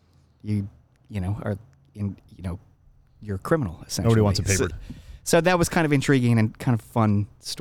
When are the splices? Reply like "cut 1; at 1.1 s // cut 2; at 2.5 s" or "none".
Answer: cut 1; at 4.7 s